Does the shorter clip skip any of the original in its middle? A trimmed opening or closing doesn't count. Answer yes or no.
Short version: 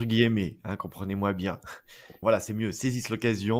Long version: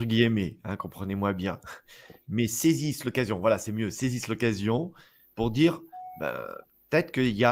yes